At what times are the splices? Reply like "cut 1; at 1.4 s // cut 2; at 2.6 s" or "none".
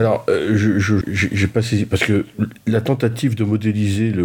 cut 1; at 1.0 s // cut 2; at 2.5 s

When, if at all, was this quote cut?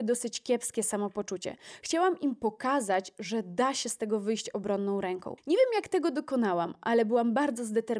cut 1; at 5.4 s

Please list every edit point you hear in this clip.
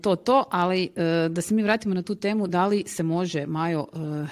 none

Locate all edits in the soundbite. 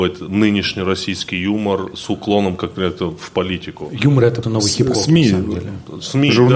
cut 1; at 4.4 s

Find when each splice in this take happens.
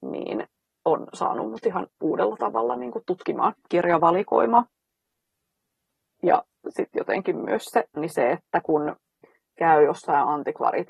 cut 1; at 6.1 s // cut 2; at 8.0 s

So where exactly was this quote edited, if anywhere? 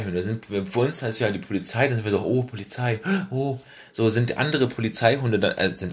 none

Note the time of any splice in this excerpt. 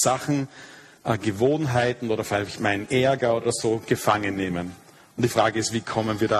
none

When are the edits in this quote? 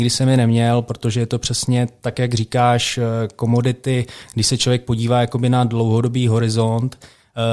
none

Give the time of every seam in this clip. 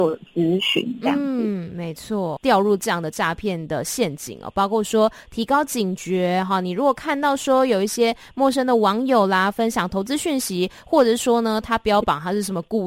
cut 1; at 2.4 s

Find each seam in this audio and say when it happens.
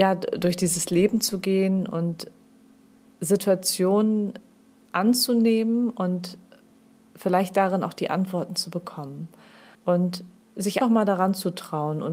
cut 1; at 9.7 s // cut 2; at 10.8 s

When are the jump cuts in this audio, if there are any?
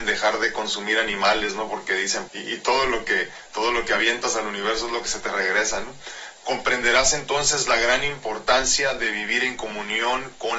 cut 1; at 2.3 s // cut 2; at 6.4 s

